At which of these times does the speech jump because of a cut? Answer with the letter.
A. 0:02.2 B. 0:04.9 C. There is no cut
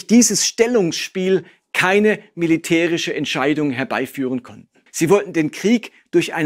B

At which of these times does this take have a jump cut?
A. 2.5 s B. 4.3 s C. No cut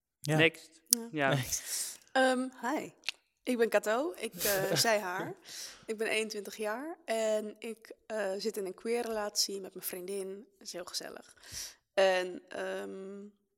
C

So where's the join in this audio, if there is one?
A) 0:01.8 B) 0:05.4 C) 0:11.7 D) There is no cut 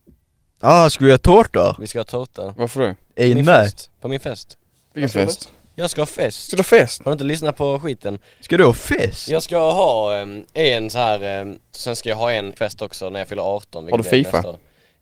C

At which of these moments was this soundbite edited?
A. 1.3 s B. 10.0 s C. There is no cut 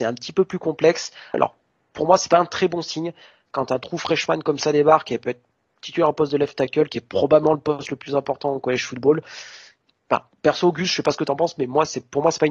A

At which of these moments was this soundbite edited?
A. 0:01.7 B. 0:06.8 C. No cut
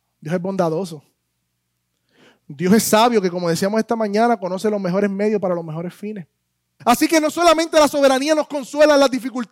B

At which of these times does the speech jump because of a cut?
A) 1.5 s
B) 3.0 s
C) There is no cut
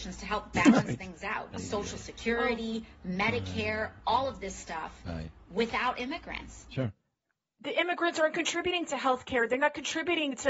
A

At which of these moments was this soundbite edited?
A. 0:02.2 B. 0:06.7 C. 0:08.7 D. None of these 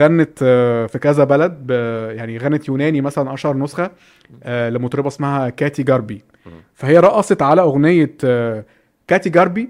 B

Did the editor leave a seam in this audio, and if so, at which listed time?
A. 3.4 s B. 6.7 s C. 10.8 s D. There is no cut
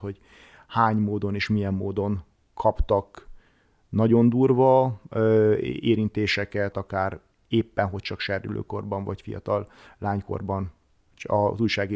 B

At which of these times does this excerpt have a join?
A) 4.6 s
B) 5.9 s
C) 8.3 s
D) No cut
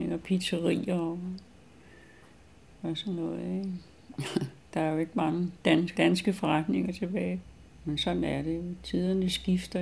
B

